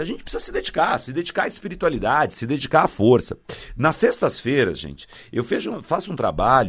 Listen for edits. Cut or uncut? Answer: uncut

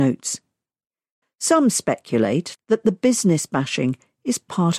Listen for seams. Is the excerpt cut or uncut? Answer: cut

